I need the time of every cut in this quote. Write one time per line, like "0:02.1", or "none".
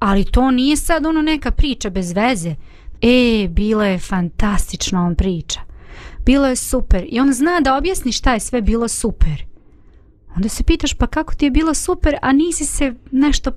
0:02.9